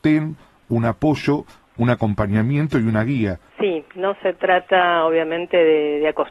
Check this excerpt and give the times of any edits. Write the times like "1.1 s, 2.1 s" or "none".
3.5 s